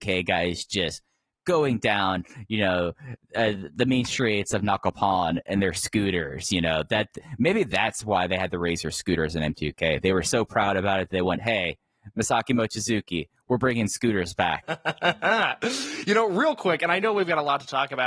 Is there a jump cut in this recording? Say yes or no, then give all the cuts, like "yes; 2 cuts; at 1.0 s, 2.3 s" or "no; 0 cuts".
yes; 1 cut; at 14.6 s